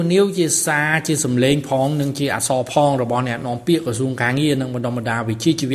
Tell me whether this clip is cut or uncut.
uncut